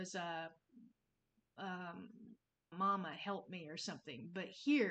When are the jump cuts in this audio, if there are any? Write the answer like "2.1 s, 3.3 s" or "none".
2.7 s

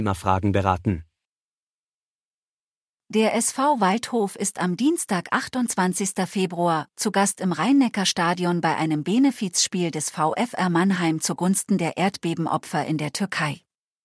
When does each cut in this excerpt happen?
6.9 s

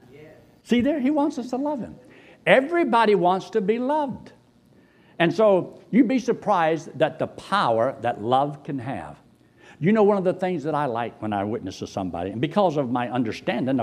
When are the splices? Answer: none

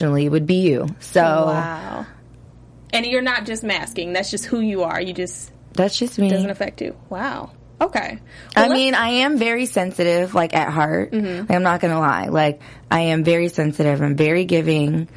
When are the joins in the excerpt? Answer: none

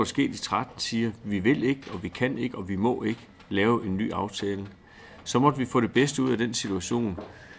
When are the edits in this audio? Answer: none

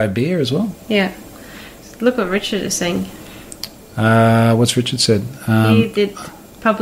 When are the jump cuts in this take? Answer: none

